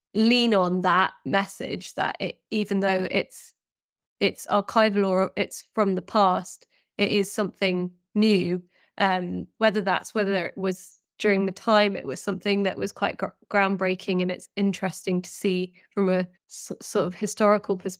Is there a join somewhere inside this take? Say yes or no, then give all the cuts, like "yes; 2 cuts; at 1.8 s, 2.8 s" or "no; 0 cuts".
yes; 2 cuts; at 9.6 s, 16.4 s